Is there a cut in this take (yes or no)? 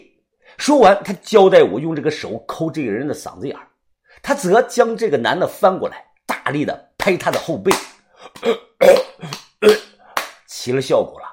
yes